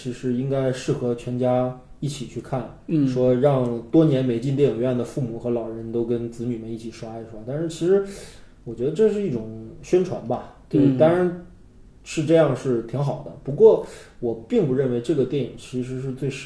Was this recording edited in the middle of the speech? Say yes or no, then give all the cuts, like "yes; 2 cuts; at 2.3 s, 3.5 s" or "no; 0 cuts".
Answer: no; 0 cuts